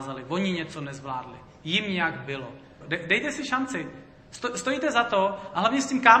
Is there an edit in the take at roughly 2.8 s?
yes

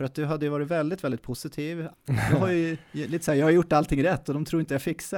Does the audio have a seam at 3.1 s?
no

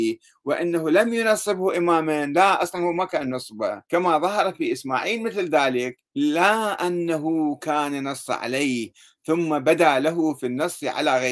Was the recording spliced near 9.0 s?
no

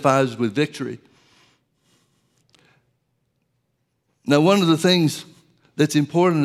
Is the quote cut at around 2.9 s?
no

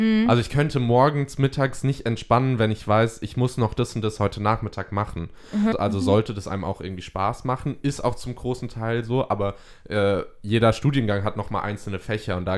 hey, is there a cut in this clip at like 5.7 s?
yes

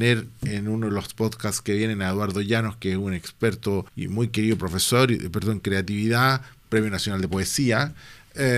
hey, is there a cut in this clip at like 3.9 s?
yes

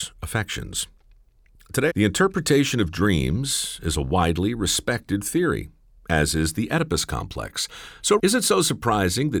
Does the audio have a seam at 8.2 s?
yes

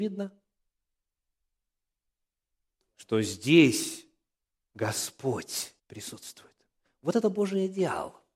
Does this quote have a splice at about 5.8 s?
yes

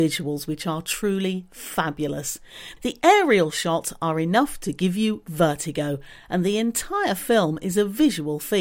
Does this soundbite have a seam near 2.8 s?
yes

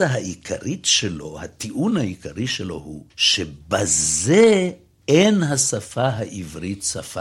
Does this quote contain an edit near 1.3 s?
no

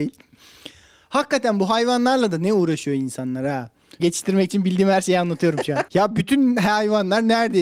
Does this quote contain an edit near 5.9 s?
yes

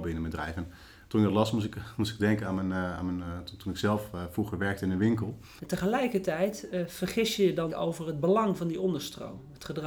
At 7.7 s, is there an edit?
yes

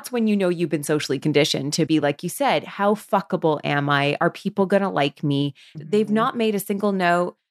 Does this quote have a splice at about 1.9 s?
yes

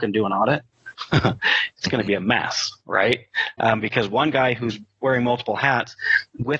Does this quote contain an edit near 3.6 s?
no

